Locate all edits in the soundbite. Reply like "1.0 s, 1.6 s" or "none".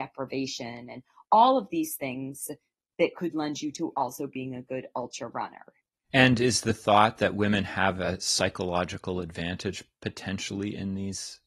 6.0 s